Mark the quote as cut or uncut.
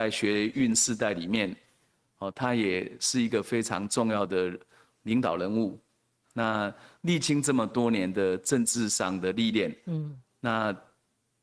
uncut